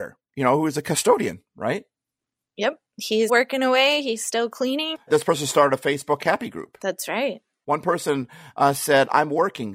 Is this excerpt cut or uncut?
cut